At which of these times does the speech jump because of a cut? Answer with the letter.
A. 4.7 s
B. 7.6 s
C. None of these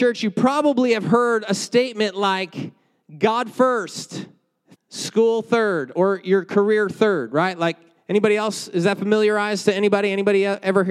A